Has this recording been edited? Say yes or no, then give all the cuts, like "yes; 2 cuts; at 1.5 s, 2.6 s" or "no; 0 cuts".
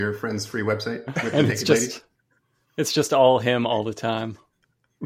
no; 0 cuts